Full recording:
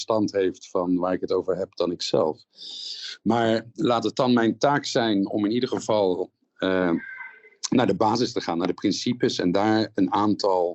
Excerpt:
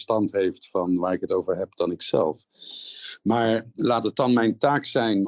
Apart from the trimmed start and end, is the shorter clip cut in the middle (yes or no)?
no